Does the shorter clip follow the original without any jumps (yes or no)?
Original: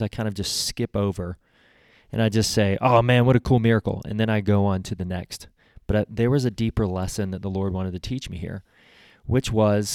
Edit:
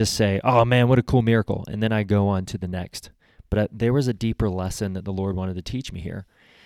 yes